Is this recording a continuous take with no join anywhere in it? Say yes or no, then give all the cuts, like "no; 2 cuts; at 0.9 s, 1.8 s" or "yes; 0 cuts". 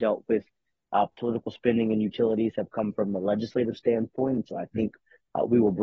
yes; 0 cuts